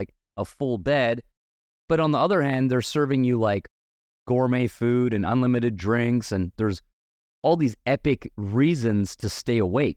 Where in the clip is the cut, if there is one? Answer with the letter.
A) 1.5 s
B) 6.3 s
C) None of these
C